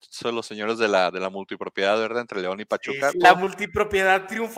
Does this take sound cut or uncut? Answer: cut